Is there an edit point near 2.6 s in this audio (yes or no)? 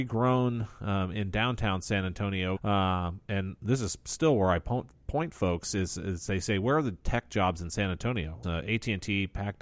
yes